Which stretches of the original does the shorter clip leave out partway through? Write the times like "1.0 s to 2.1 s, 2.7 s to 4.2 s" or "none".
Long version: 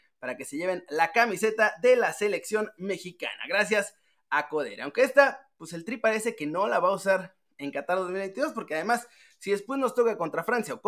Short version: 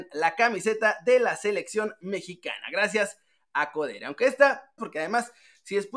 5.5 s to 8.5 s